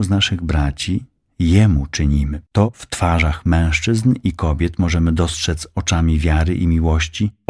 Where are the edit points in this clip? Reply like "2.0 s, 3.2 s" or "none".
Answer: 2.5 s

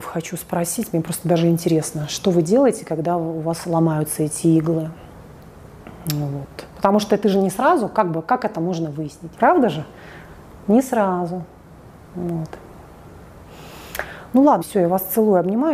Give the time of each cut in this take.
9.3 s, 14.6 s

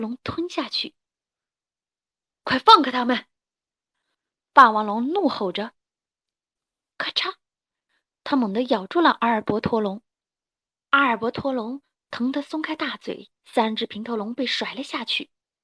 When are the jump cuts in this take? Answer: 10.7 s, 13.4 s

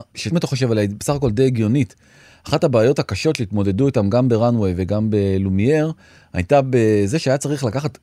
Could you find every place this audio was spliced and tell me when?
none

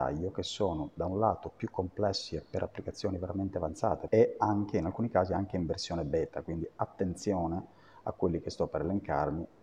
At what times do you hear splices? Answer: none

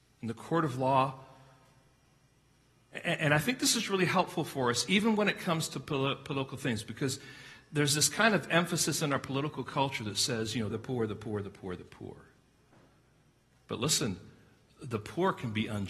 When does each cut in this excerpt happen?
10.7 s

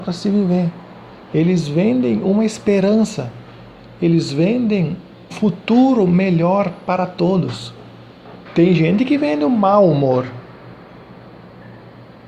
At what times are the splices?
5.3 s, 8.5 s

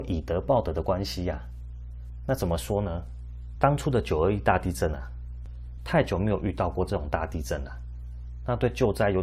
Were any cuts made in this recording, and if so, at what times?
3.6 s, 5.8 s

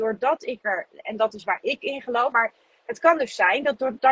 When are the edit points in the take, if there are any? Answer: 2.3 s

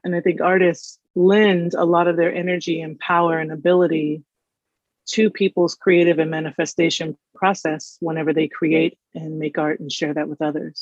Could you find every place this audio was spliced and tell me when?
1.1 s

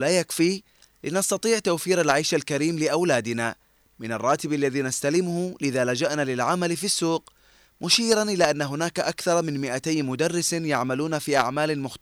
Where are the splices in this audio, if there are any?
none

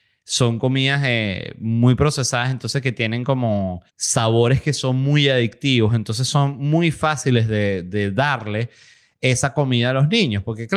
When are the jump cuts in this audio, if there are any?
3.9 s

